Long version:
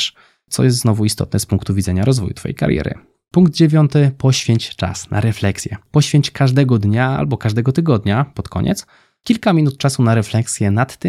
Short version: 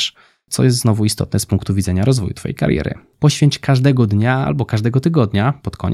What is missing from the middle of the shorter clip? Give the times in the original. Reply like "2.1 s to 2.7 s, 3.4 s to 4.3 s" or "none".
3.1 s to 5.8 s